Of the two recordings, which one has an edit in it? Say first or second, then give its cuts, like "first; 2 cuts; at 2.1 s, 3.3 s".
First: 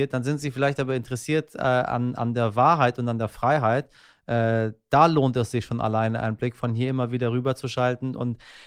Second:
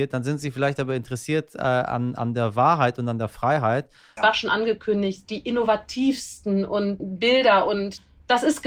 second; 2 cuts; at 4.2 s, 7.0 s